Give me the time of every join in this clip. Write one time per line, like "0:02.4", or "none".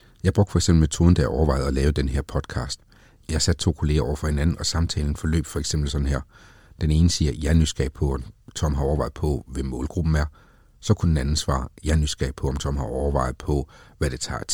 none